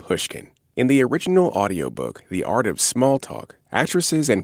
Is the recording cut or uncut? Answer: uncut